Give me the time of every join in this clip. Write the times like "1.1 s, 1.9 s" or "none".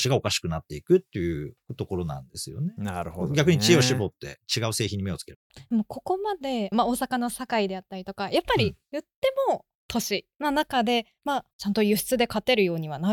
6.7 s, 11.5 s